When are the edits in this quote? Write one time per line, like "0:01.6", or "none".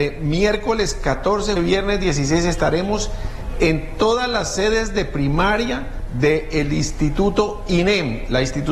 0:01.6